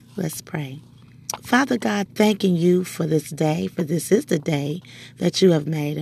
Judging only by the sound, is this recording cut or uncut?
cut